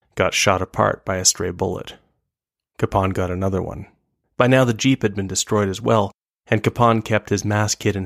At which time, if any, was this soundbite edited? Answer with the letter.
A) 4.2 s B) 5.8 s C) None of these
A